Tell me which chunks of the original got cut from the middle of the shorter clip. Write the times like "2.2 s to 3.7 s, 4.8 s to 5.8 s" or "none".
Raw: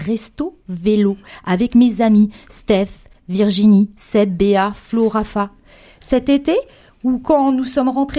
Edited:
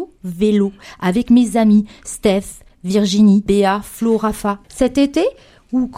3.9 s to 4.4 s, 5.6 s to 6.0 s